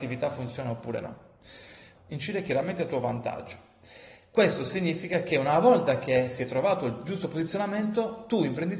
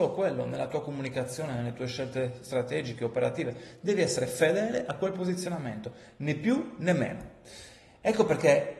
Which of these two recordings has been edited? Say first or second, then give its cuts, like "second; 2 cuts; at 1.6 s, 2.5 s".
first; 1 cut; at 1.9 s